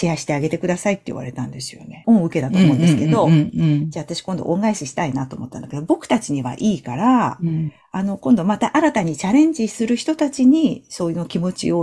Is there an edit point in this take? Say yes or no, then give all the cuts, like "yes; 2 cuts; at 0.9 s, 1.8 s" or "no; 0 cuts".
yes; 1 cut; at 2.0 s